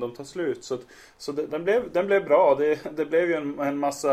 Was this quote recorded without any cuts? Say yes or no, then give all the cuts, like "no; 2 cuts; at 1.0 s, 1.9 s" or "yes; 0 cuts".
no; 1 cut; at 1.5 s